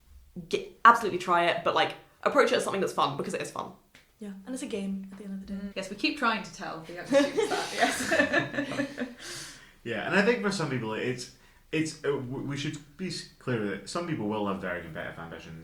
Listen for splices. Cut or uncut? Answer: cut